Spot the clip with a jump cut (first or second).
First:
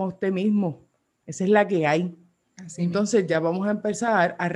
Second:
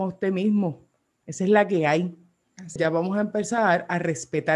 second